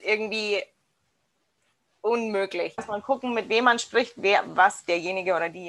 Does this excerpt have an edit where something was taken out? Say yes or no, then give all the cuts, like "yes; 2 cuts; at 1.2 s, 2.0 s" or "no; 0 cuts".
yes; 1 cut; at 2.8 s